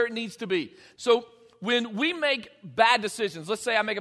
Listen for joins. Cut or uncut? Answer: cut